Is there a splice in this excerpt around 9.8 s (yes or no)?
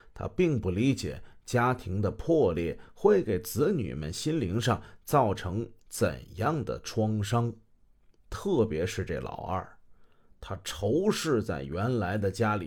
no